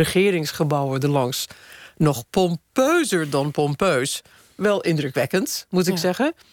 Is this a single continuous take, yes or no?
yes